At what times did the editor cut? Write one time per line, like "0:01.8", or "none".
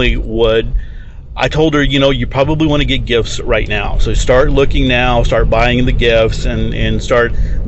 none